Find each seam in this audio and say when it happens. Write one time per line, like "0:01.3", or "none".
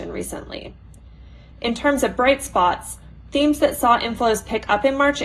none